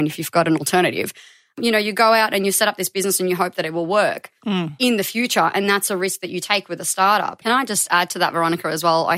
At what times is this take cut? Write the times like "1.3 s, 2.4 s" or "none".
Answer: 7.4 s